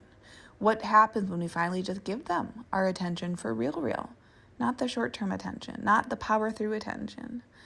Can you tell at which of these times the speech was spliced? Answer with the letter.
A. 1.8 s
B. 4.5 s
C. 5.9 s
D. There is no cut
D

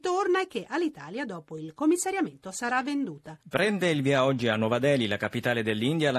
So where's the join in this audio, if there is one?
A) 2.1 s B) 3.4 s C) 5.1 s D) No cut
B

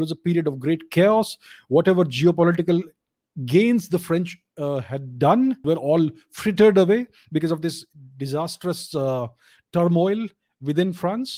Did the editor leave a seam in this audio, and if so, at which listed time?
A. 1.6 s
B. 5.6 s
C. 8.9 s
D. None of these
B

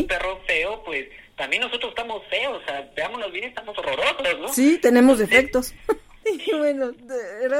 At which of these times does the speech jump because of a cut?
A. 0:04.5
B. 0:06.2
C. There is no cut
B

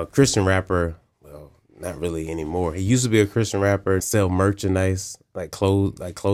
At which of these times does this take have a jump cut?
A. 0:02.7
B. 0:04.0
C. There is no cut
B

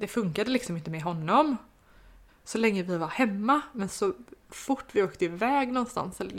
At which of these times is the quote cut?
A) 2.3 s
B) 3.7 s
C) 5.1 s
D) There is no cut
A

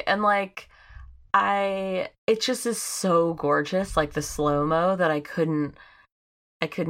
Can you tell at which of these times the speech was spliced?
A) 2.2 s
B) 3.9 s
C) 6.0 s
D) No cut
A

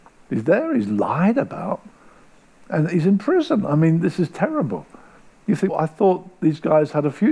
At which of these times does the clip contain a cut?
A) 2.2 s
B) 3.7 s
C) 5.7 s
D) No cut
C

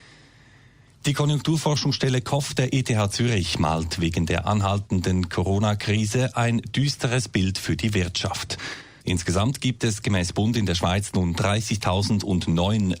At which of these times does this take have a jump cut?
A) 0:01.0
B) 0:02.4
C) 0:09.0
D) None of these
C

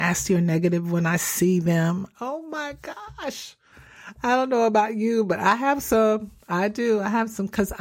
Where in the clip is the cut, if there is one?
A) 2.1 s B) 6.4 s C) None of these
A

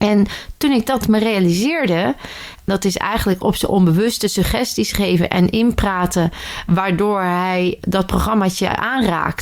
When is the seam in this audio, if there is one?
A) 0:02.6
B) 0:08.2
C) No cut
A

